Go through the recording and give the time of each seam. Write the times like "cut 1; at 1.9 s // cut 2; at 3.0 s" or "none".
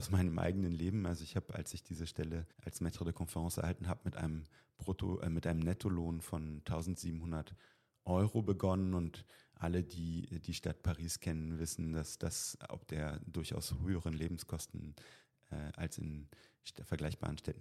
cut 1; at 2.5 s